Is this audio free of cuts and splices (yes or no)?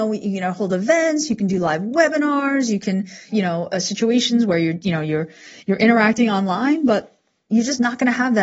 no